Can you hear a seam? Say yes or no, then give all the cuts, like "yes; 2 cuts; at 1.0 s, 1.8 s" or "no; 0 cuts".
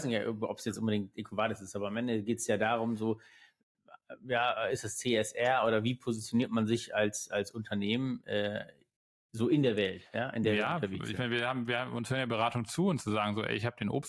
no; 0 cuts